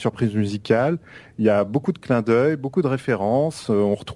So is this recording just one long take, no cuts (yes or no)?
yes